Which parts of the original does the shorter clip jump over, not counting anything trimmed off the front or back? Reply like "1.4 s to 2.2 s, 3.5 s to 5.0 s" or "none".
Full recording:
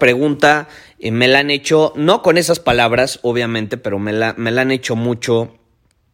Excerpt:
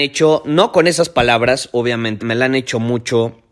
3.7 s to 4.4 s